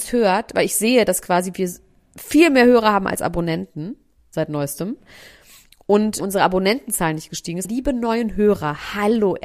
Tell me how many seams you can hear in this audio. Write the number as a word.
two